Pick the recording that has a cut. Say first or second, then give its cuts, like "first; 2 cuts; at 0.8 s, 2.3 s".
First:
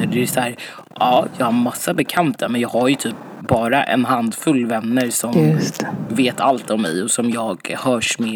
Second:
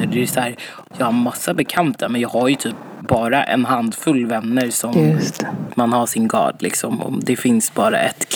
second; 2 cuts; at 0.9 s, 5.7 s